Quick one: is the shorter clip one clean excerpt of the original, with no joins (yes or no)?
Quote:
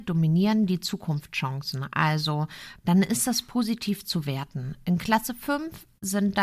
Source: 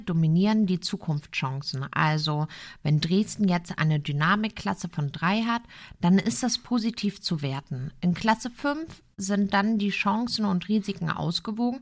no